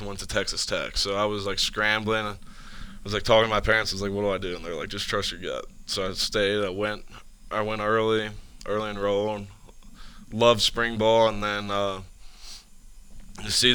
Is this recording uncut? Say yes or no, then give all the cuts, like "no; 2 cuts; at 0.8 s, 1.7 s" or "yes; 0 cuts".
yes; 0 cuts